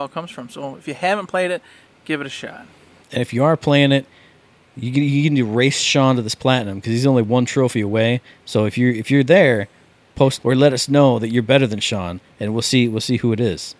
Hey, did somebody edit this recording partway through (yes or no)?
no